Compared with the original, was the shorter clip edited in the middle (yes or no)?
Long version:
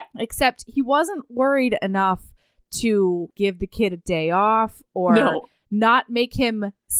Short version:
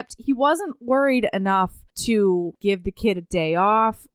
yes